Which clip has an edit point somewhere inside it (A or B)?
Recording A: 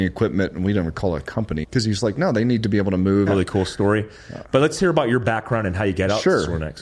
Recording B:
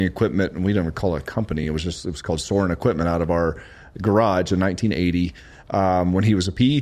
A